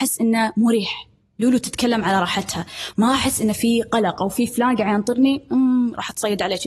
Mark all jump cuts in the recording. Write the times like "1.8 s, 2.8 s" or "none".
none